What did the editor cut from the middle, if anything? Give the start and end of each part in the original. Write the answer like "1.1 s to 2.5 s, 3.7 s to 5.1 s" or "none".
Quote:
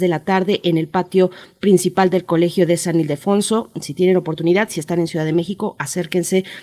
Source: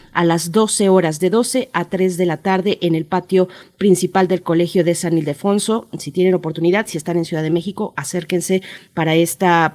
none